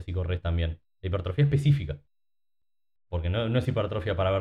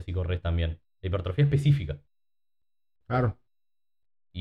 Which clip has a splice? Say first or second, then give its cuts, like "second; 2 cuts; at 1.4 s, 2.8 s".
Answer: second; 1 cut; at 3.0 s